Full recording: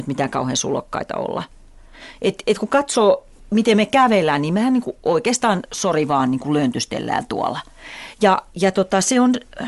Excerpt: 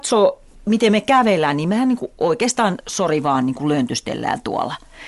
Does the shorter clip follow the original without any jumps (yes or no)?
yes